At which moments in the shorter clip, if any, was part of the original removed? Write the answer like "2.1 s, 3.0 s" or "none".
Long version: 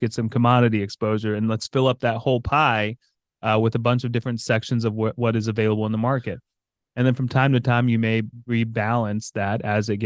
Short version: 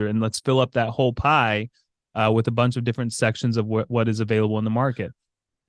none